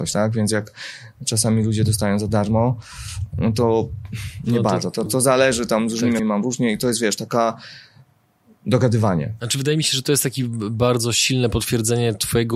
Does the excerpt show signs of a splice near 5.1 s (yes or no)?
yes